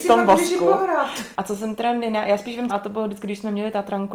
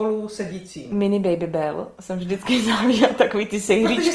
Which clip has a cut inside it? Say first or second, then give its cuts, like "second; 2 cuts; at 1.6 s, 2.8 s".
first; 2 cuts; at 1.3 s, 2.7 s